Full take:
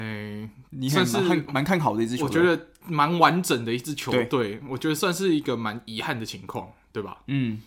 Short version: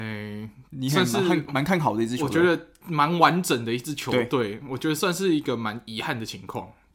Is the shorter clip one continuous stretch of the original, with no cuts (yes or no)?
yes